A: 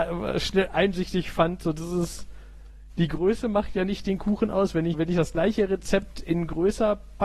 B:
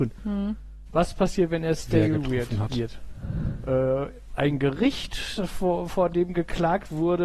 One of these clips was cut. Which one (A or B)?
A